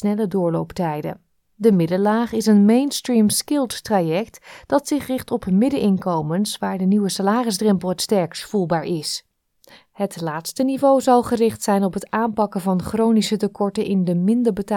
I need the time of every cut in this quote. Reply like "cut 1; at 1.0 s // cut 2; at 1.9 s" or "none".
none

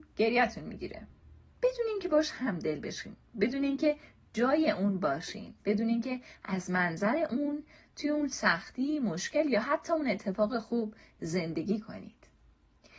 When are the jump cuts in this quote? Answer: none

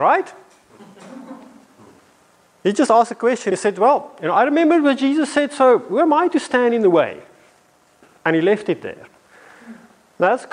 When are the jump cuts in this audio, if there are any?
none

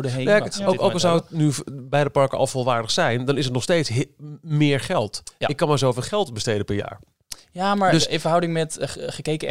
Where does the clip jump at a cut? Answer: none

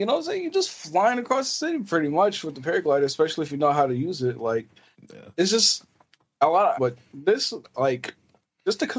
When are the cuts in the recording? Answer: cut 1; at 6.7 s

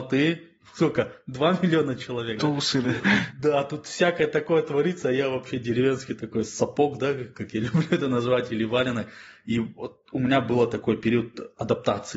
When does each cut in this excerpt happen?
cut 1; at 2.8 s

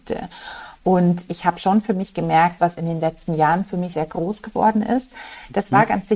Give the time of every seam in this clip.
cut 1; at 1.3 s // cut 2; at 2.6 s // cut 3; at 3.9 s

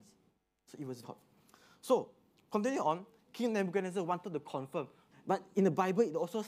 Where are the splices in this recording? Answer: cut 1; at 1.0 s // cut 2; at 5.1 s

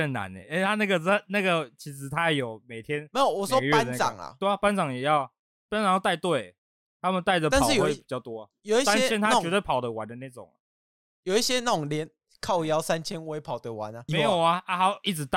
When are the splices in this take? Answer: cut 1; at 14.1 s

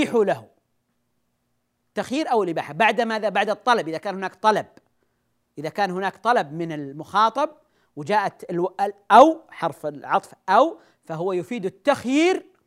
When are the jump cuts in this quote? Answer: none

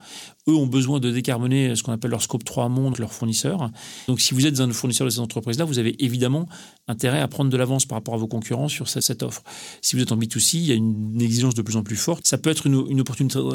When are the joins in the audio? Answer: cut 1; at 2.9 s // cut 2; at 12.2 s

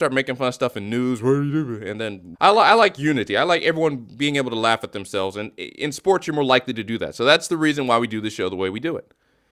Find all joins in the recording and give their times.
cut 1; at 2.3 s

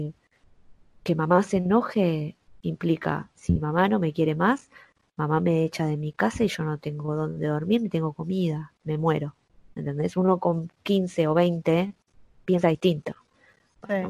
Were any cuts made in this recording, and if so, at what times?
none

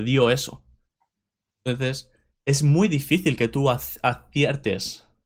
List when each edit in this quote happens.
none

